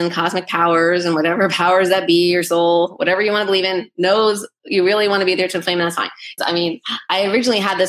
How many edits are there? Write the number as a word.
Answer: one